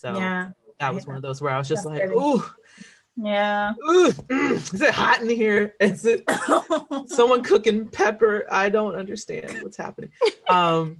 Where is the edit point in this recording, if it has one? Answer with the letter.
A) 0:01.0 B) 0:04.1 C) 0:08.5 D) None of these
B